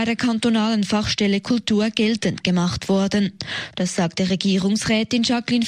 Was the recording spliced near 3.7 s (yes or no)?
yes